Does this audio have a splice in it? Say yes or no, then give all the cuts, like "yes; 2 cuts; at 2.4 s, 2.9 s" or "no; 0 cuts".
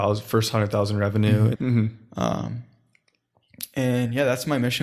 yes; 1 cut; at 1.5 s